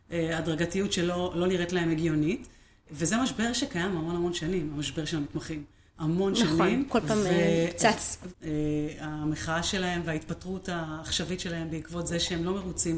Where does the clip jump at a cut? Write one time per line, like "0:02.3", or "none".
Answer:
0:06.9
0:08.3